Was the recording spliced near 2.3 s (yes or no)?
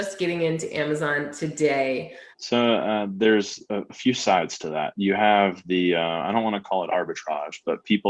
yes